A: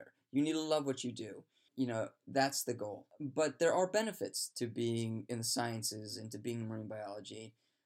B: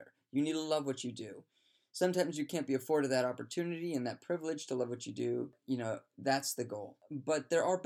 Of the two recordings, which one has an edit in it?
A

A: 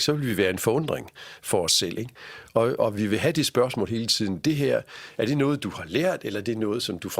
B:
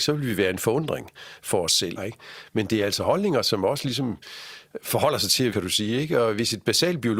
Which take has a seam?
B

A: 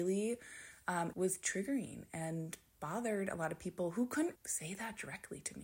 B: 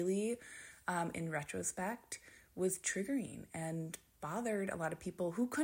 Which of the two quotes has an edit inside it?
A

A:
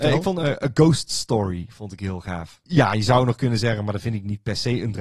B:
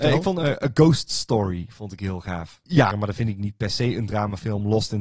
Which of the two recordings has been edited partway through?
B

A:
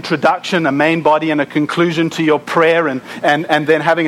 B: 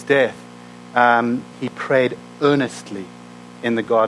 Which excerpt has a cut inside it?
B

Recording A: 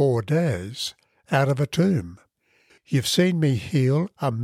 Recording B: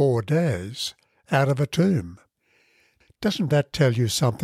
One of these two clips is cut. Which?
A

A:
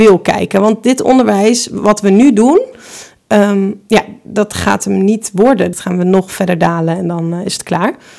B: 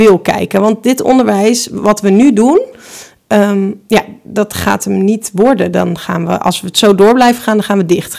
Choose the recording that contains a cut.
A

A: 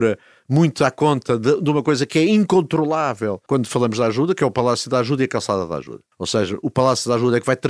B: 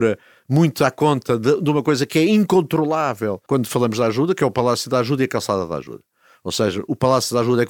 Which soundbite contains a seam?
A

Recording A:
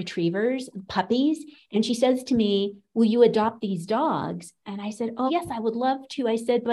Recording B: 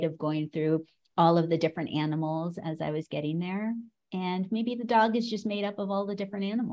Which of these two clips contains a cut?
A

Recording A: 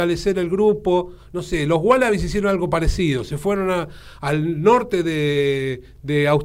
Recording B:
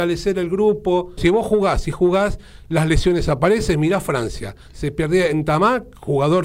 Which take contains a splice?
B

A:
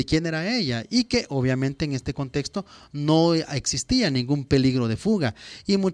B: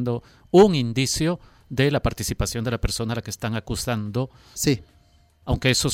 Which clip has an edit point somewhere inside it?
B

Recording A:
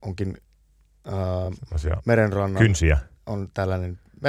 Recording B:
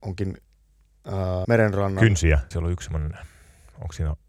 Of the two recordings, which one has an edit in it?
B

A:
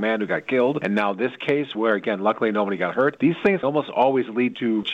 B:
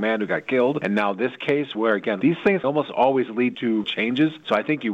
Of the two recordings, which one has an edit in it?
B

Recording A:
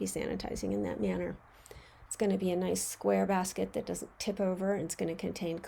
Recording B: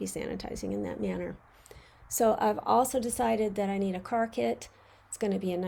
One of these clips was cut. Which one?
A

